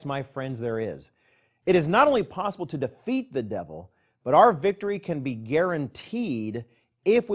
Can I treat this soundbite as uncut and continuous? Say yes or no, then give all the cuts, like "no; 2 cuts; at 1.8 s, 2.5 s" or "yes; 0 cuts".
yes; 0 cuts